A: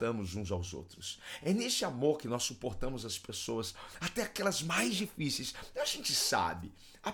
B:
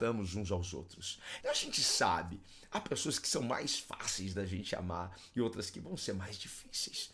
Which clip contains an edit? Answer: B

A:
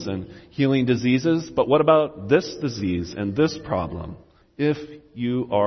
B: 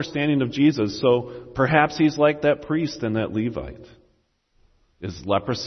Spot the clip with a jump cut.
A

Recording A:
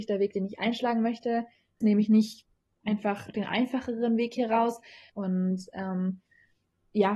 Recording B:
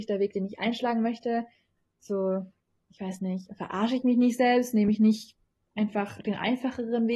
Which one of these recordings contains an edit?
A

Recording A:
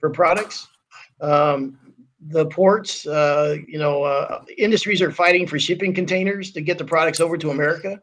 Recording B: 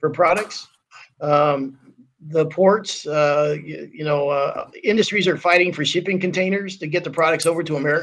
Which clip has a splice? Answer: A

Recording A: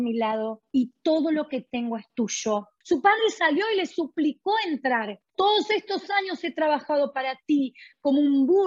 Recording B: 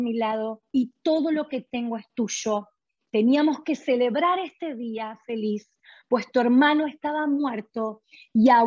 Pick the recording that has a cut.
A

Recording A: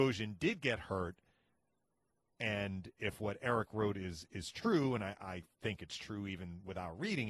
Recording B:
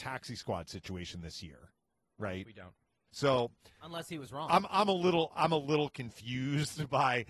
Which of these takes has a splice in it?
B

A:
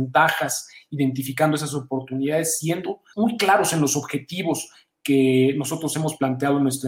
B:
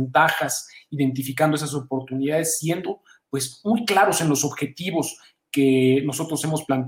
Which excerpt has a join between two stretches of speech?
A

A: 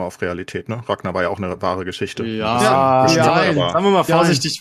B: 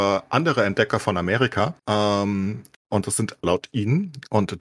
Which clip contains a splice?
B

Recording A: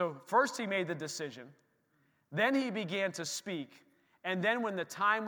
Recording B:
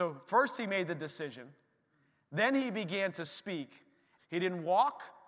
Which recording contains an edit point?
B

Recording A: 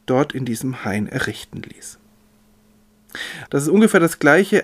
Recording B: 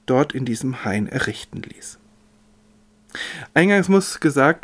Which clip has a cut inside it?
A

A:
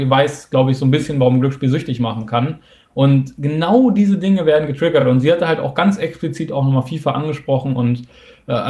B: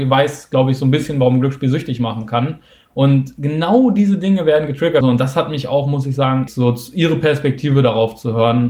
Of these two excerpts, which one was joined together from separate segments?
B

